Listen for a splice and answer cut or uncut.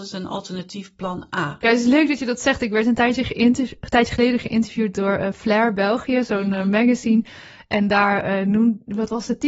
cut